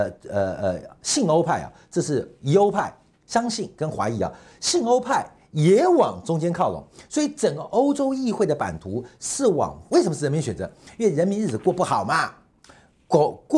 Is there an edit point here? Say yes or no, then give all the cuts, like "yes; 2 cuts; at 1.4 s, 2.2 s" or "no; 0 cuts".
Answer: yes; 1 cut; at 9.9 s